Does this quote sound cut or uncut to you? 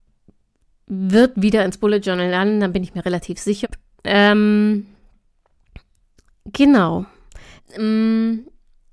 cut